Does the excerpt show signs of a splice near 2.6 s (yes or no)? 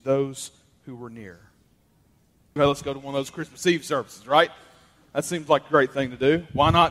yes